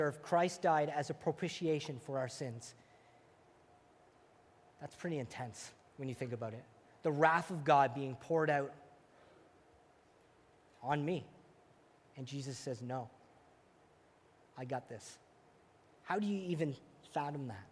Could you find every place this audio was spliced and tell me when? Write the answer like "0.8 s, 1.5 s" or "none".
none